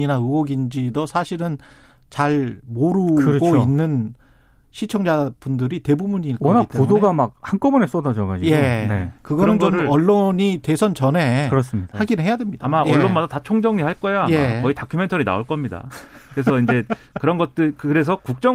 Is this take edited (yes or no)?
yes